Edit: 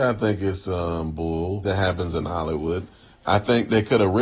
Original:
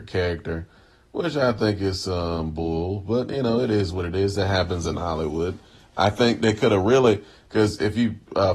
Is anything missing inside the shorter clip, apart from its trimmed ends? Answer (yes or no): yes